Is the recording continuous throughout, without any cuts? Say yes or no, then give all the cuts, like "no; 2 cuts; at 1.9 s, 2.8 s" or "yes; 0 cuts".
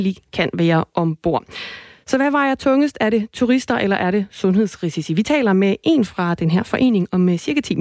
yes; 0 cuts